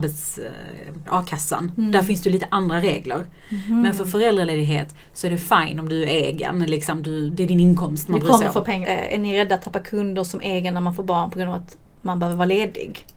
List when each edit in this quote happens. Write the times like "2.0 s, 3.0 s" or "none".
1.1 s, 8.8 s